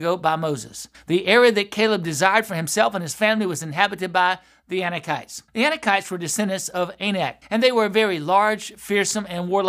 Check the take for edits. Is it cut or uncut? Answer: cut